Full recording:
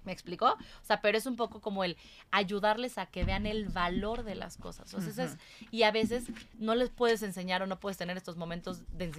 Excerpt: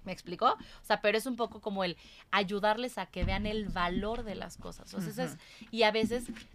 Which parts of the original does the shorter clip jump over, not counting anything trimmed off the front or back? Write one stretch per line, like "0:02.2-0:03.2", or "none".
none

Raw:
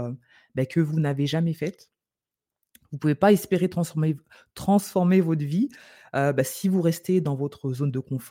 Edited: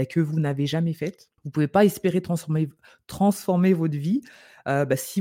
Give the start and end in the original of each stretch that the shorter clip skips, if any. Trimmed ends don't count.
0:02.0-0:02.9

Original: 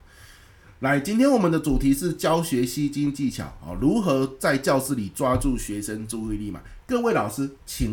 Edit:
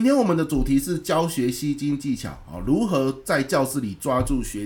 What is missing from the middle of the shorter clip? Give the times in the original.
none

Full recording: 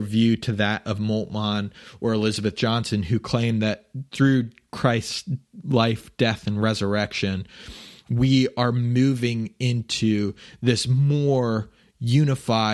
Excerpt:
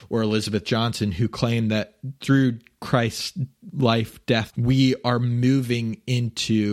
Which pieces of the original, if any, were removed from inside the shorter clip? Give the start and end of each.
0:06.4-0:08.0

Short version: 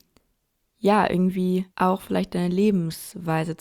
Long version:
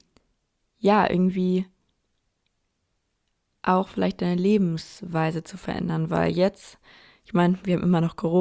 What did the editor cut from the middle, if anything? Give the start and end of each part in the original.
0:01.7-0:03.6

